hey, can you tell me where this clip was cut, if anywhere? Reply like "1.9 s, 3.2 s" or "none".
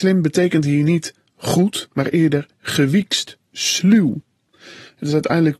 none